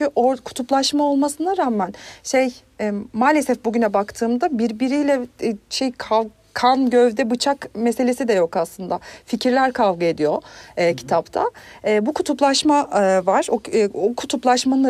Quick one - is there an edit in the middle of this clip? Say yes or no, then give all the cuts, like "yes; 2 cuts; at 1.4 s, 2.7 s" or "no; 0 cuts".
no; 0 cuts